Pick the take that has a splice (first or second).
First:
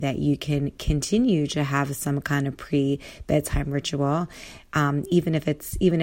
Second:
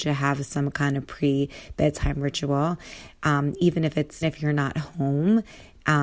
second